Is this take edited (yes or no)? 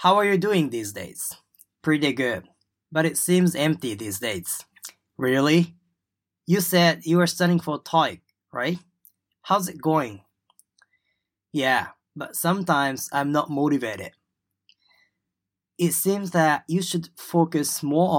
no